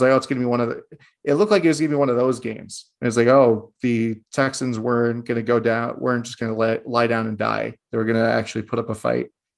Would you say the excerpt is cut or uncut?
uncut